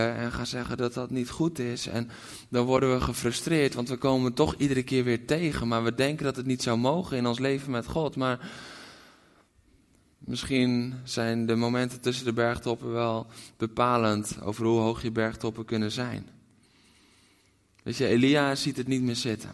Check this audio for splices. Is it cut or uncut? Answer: uncut